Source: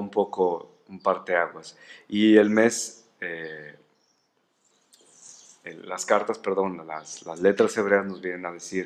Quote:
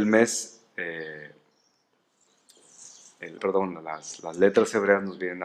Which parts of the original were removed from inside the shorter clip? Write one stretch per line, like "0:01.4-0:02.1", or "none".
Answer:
0:05.8-0:06.4